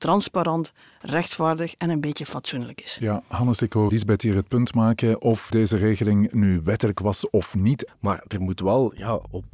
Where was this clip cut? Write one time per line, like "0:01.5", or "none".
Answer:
0:03.9
0:05.5
0:07.9